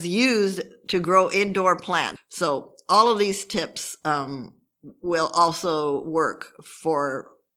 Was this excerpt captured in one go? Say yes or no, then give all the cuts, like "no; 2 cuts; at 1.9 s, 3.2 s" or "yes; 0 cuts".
no; 1 cut; at 2.2 s